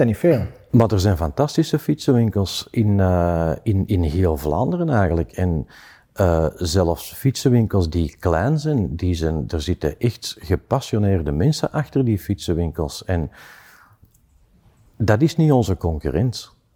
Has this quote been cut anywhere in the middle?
no; 0 cuts

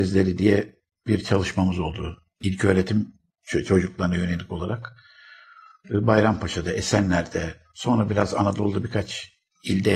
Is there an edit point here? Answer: no; 0 cuts

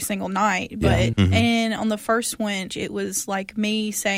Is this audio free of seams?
no; 2 cuts; at 1.1 s, 2.7 s

